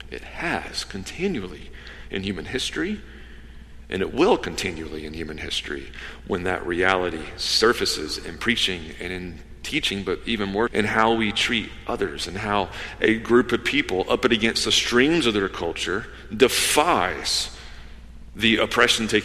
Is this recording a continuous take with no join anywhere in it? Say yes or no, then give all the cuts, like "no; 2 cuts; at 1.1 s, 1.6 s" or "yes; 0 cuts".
no; 1 cut; at 10.7 s